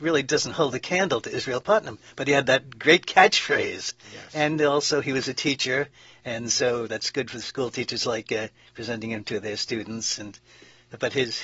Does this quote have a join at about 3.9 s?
no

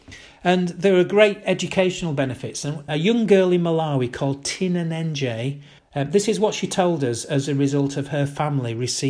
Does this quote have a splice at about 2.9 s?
yes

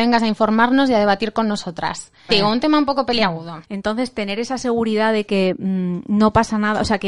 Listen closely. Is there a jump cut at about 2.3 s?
yes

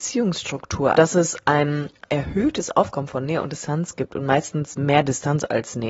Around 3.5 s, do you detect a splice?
no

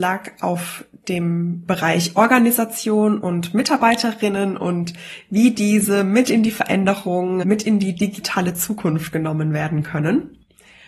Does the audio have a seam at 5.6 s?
no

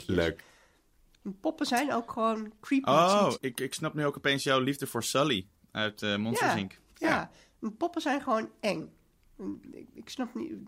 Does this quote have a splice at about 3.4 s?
yes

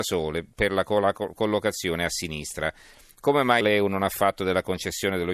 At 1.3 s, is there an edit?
no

